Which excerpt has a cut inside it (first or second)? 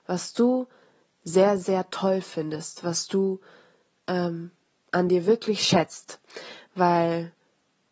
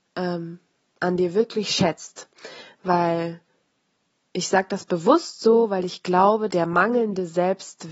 second